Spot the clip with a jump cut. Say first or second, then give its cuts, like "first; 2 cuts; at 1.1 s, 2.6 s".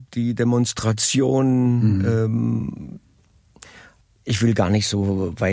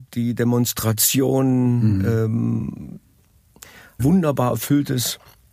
second; 1 cut; at 4.0 s